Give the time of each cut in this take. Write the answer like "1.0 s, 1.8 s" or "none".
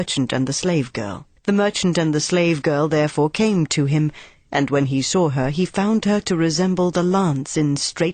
1.4 s